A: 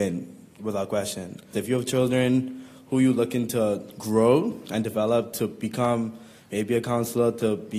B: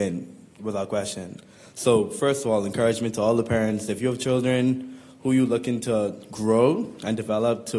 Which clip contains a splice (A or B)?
A